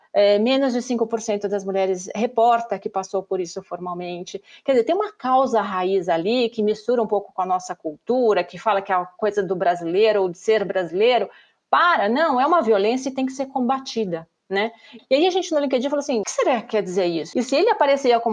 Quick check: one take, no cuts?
no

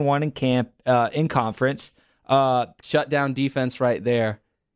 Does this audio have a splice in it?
yes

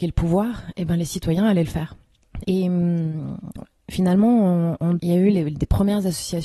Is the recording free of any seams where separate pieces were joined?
no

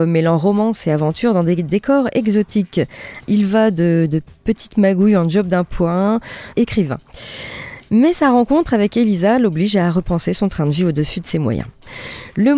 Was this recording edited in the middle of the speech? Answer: yes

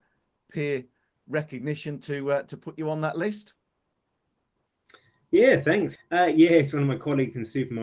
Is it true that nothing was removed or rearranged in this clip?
no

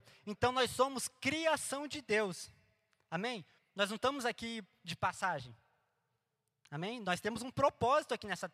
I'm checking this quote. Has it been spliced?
yes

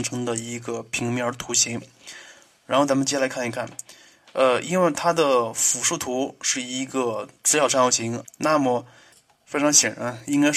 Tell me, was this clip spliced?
yes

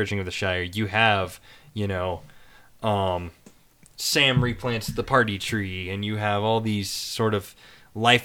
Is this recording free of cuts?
yes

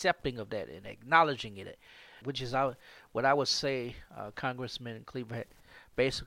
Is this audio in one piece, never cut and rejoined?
no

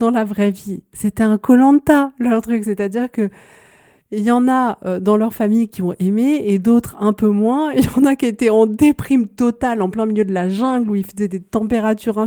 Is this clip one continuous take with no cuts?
yes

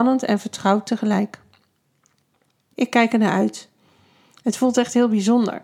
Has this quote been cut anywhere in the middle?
yes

